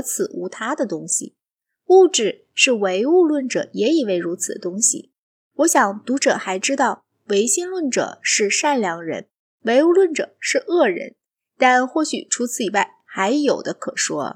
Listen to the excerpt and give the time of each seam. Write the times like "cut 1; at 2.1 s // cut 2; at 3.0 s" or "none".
none